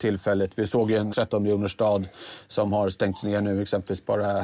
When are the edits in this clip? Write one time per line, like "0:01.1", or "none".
0:01.1